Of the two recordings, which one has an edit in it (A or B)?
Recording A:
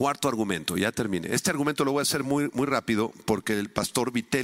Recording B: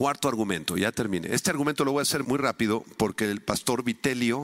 B